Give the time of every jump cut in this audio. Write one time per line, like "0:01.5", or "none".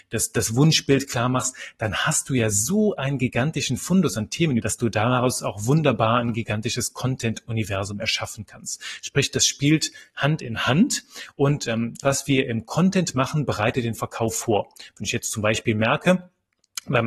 0:04.6
0:12.0